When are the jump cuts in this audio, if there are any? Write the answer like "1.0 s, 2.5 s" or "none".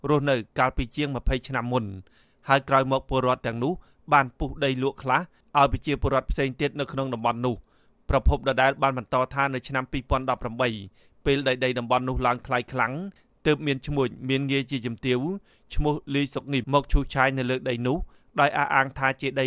16.6 s